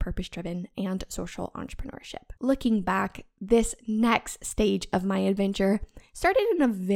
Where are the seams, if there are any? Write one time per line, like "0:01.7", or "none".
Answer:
0:02.4